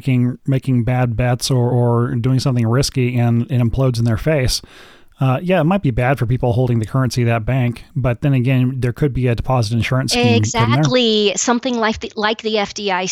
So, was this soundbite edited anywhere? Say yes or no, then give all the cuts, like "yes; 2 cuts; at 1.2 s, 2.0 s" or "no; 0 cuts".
no; 0 cuts